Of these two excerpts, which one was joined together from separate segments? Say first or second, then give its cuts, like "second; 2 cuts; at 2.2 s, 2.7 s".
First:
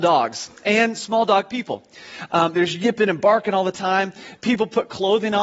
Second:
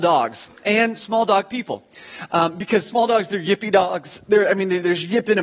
first; 1 cut; at 2.5 s